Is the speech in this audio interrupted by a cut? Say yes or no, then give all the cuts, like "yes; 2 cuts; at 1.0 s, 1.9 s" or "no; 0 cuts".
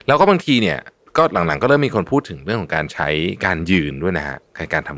no; 0 cuts